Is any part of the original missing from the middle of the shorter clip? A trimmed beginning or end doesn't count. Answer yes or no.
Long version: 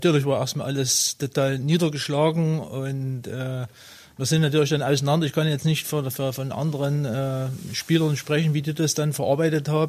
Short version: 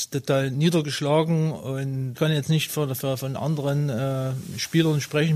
yes